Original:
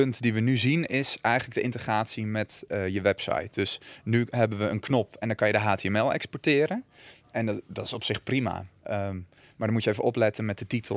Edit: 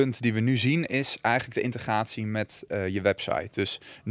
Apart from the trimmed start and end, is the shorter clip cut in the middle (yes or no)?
no